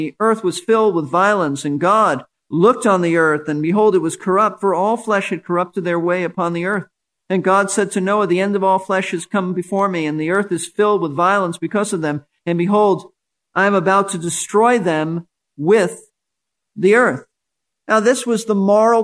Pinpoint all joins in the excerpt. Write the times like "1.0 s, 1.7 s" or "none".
none